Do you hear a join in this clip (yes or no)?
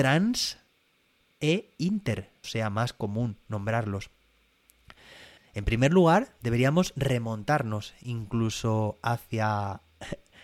yes